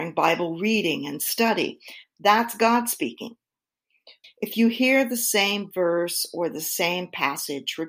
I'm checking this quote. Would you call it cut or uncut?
cut